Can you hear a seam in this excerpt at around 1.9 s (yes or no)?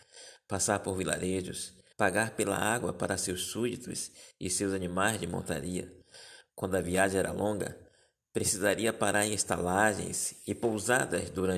yes